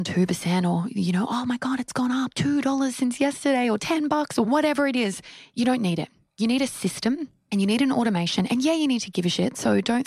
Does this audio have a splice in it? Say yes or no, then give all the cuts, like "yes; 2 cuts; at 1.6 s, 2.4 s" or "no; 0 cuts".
no; 0 cuts